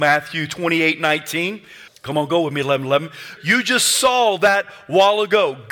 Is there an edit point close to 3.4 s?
yes; 2 cuts; at 1.9 s, 3.4 s

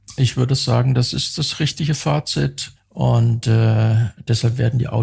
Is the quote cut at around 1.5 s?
no; 1 cut; at 2.8 s

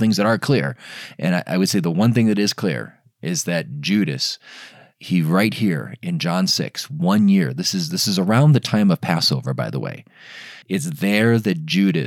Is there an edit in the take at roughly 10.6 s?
yes; 1 cut; at 10.6 s

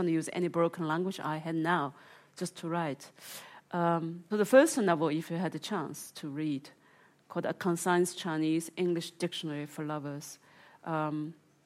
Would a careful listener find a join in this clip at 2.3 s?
no; 1 cut; at 4.3 s

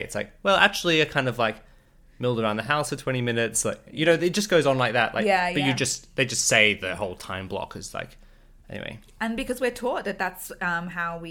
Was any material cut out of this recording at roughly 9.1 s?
no; 0 cuts

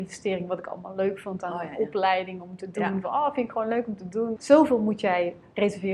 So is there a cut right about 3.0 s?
no; 1 cut; at 4.4 s

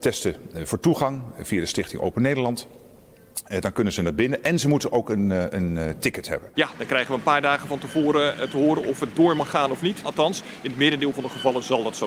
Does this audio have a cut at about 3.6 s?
no; 2 cuts; at 6.6 s, 10.0 s

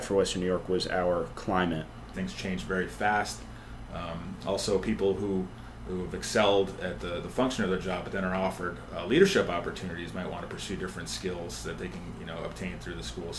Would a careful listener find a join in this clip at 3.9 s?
no; 1 cut; at 2.1 s

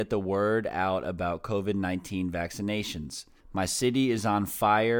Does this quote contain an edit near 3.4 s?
yes; 1 cut; at 3.4 s

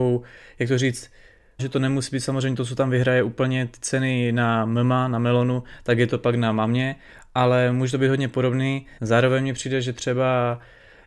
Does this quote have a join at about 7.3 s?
no; 2 cuts; at 1.6 s, 9.0 s

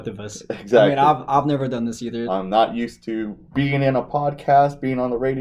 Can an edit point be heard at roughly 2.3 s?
yes; 2 cuts; at 2.3 s, 3.5 s

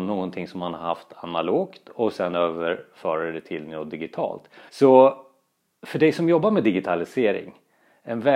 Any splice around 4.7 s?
yes; 1 cut; at 4.7 s

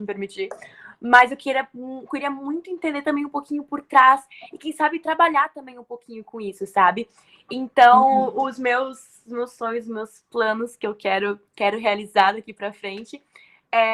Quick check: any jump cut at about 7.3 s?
no; 0 cuts

